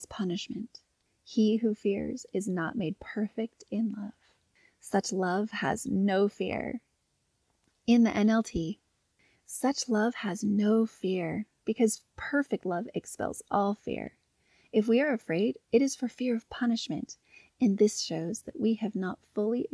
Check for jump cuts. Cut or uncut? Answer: uncut